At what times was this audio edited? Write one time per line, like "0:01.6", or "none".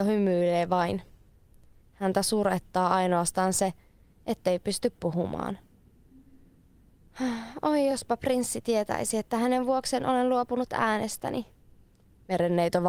none